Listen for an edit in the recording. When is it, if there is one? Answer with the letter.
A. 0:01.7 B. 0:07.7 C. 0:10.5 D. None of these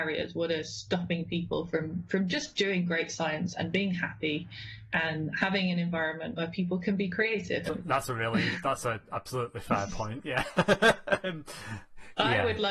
B